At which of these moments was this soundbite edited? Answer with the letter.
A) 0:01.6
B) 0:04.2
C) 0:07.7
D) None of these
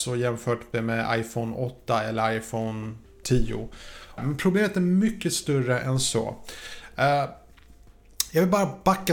B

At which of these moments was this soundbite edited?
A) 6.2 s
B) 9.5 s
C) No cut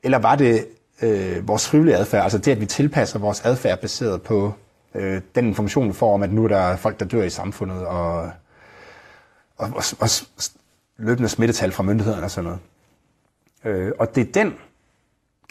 C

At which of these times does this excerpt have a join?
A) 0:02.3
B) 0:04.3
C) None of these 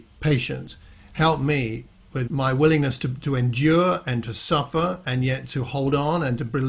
A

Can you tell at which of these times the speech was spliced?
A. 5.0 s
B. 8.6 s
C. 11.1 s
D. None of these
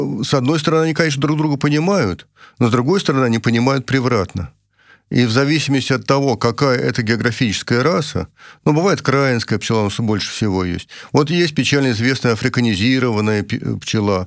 D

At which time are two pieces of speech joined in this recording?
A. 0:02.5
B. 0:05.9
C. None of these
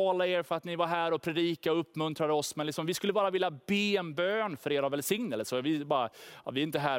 C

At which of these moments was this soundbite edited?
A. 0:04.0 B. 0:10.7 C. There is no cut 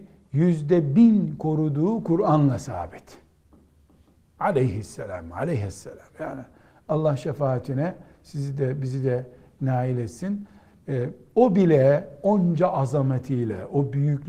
C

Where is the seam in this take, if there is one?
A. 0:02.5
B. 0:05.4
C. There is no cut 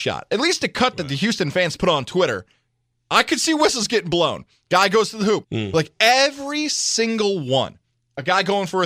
B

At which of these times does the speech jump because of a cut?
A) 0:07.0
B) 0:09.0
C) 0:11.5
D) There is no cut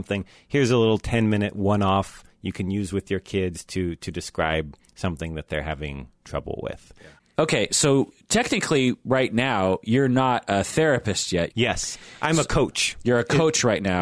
C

